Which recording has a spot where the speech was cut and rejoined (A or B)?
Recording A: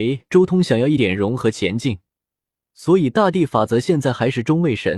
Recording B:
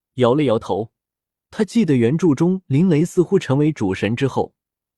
A